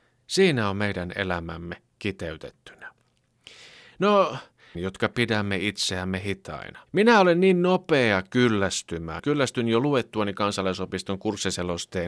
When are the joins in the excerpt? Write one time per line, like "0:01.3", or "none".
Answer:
0:04.7
0:06.9
0:09.2